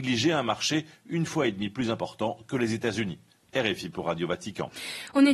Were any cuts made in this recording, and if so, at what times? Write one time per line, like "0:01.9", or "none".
0:03.4